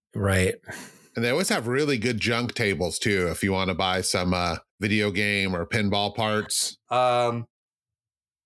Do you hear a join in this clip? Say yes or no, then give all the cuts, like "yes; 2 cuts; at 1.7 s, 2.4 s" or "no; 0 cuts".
yes; 2 cuts; at 4.7 s, 6.9 s